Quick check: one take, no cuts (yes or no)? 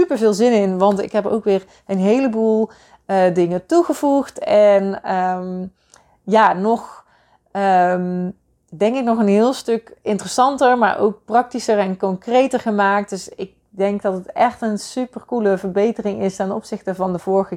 yes